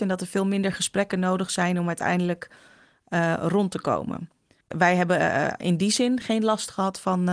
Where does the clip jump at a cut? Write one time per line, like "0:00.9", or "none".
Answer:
0:04.6
0:06.2